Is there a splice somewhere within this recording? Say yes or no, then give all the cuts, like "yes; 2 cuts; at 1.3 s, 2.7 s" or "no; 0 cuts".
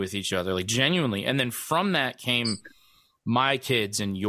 no; 0 cuts